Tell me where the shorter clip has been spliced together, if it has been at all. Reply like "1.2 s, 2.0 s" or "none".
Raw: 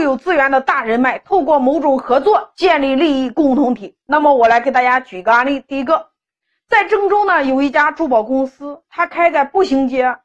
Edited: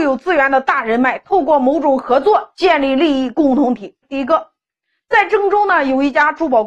4.0 s